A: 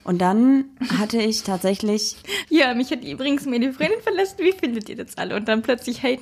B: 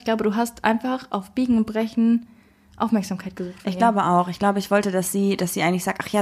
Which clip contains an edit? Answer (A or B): A